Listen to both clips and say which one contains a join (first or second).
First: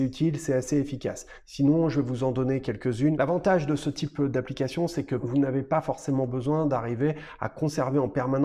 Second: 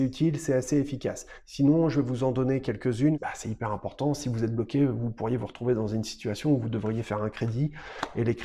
second